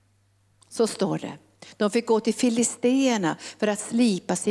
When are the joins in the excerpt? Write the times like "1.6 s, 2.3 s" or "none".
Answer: none